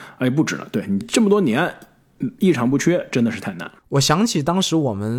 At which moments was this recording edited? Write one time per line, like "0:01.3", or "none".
0:01.0
0:03.8